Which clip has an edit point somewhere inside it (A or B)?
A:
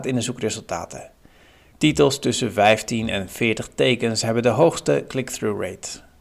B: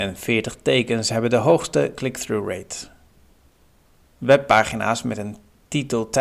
A